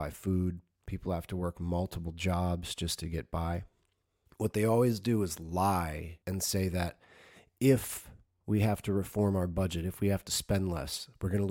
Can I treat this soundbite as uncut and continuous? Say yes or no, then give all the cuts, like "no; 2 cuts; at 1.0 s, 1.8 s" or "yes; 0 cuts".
no; 2 cuts; at 4.3 s, 6.2 s